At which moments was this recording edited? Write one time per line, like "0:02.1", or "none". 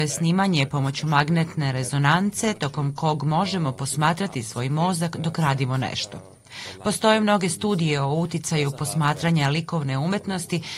none